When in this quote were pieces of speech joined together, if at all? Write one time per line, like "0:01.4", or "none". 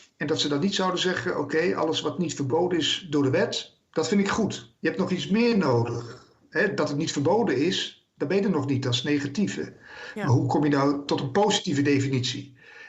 none